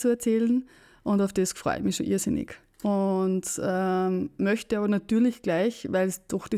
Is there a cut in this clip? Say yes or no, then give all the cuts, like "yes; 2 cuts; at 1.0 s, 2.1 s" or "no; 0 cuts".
no; 0 cuts